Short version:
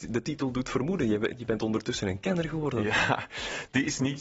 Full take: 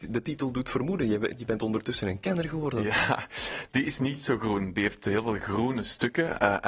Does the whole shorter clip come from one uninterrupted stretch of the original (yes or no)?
yes